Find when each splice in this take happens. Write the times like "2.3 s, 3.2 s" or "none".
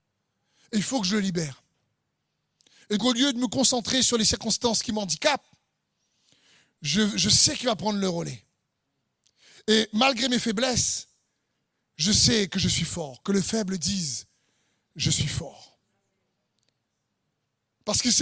3.0 s